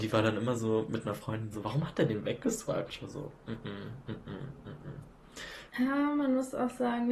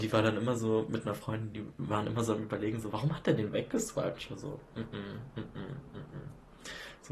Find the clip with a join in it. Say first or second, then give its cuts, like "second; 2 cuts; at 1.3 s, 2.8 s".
first; 2 cuts; at 1.5 s, 5.7 s